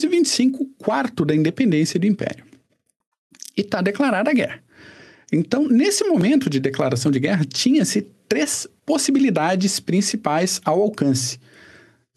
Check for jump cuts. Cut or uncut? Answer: uncut